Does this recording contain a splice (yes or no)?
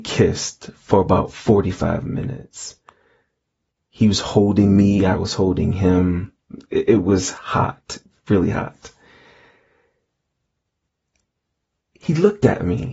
no